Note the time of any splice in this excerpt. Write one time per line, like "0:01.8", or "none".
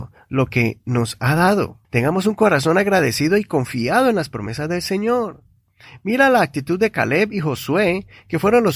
0:01.8